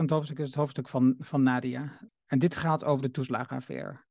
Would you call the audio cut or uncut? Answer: cut